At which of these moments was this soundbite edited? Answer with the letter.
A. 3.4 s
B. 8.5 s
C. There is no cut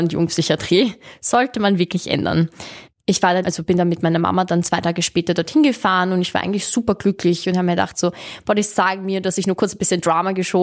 A